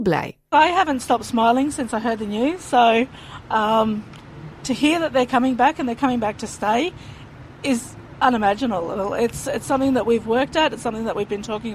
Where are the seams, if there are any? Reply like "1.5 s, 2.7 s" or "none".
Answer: none